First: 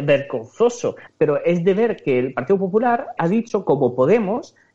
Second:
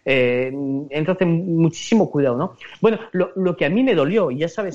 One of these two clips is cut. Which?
first; 2 cuts; at 1.1 s, 3.2 s

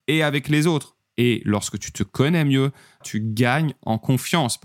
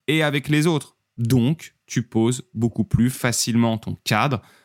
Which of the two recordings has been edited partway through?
first; 2 cuts; at 1.1 s, 3.0 s

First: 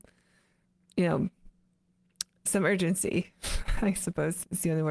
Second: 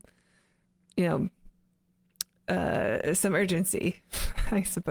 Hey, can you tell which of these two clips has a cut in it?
first; 1 cut; at 2.5 s

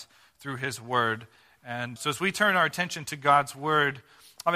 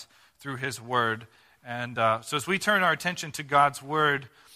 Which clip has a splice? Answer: first; 1 cut; at 2.0 s

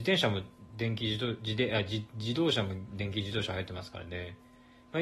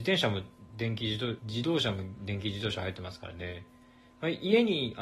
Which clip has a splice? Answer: second; 1 cut; at 1.4 s

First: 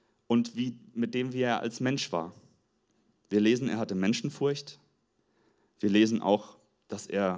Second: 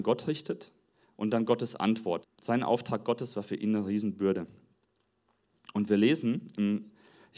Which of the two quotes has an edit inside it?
second; 1 cut; at 2.2 s

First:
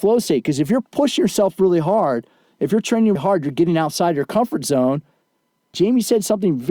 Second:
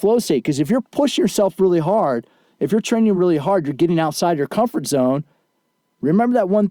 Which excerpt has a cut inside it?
first; 2 cuts; at 3.2 s, 5.7 s

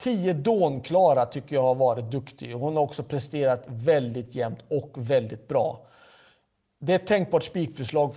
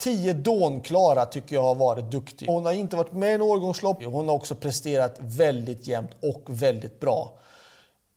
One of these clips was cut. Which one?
second; 2 cuts; at 2.5 s, 4.0 s

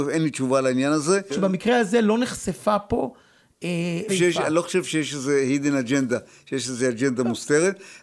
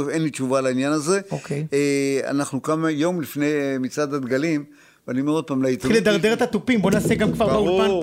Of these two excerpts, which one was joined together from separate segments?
first; 2 cuts; at 1.3 s, 4.1 s

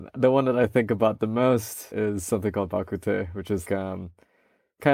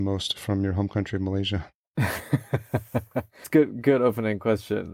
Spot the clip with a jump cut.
first; 1 cut; at 3.7 s

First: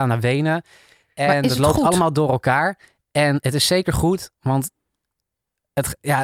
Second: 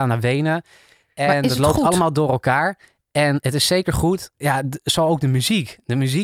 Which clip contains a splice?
second; 1 cut; at 4.3 s

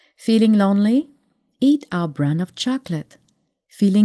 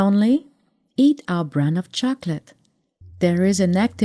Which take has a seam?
second; 1 cut; at 3.0 s

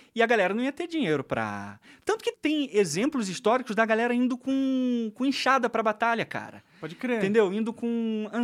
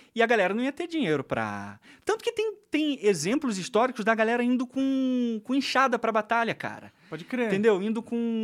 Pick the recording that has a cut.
first; 1 cut; at 2.3 s

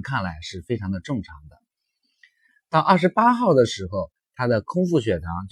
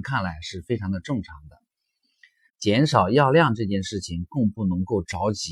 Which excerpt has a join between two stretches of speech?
second; 1 cut; at 2.5 s

